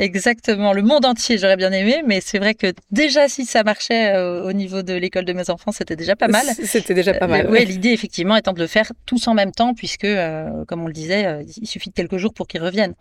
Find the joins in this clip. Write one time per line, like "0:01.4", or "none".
none